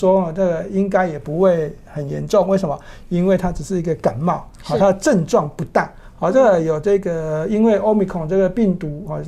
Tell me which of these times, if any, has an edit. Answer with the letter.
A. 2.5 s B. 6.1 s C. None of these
C